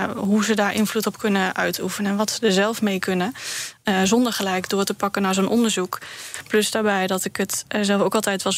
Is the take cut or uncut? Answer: uncut